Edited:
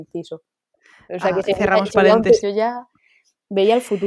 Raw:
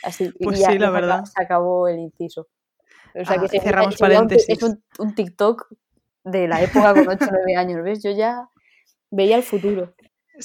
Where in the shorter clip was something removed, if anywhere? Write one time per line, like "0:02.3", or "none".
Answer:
0:02.4